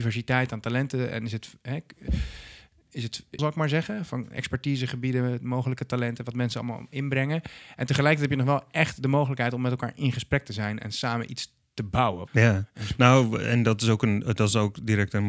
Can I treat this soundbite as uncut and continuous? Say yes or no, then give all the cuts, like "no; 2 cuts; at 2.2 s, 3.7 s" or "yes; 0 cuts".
no; 2 cuts; at 3.4 s, 12.3 s